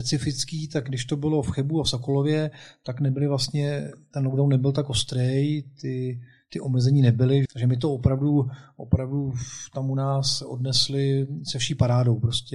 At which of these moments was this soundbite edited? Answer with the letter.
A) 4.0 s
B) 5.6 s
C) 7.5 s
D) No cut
C